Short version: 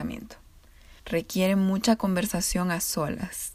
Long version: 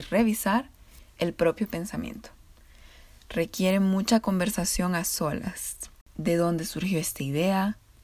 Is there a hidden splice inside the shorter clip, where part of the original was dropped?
yes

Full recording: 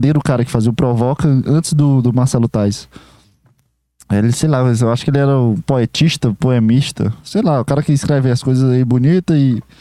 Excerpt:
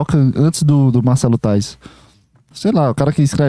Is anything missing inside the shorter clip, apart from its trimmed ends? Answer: yes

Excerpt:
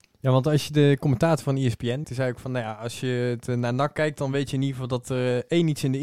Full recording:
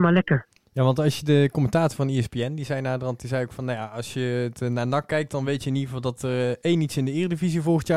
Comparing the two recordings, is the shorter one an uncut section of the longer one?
no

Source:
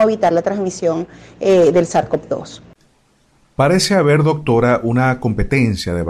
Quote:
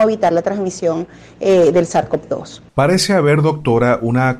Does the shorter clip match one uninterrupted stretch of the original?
no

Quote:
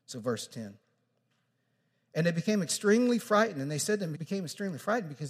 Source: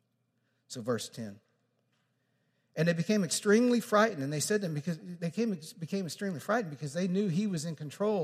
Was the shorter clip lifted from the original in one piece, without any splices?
no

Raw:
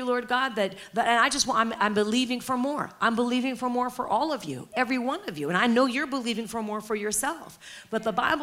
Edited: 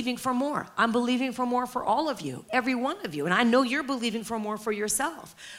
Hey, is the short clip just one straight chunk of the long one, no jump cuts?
yes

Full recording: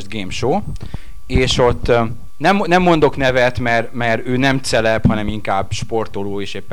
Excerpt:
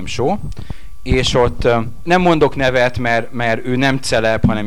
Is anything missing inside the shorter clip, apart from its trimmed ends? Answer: yes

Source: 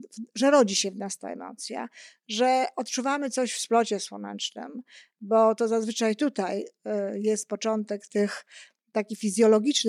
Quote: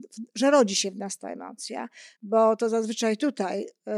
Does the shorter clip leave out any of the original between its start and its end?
yes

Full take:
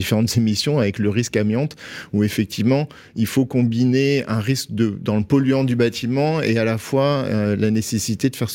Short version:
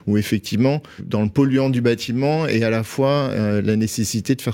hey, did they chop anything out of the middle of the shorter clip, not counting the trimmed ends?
yes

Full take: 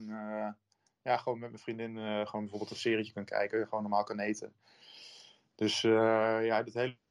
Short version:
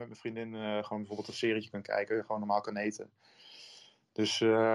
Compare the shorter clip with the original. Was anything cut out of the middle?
no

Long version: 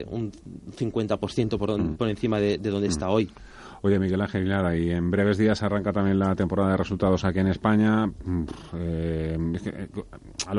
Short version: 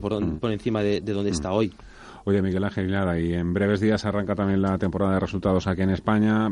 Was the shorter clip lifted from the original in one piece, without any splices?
yes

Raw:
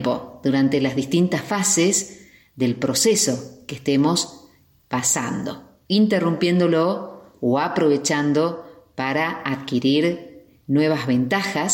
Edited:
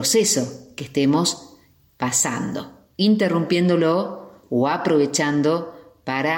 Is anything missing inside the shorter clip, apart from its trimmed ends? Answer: no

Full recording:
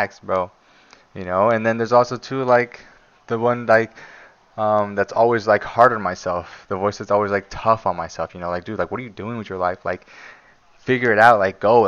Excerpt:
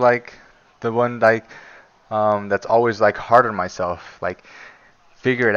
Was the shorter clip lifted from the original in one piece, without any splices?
no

